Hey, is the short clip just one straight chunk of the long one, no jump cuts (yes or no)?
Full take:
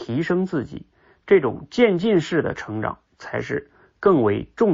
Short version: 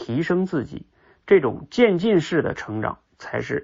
yes